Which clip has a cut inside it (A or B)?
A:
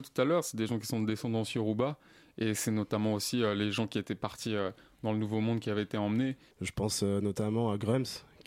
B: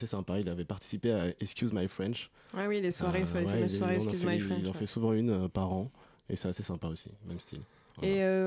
A